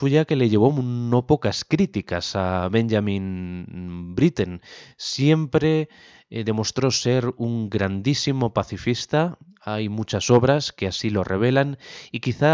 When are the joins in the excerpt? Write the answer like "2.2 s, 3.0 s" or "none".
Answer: none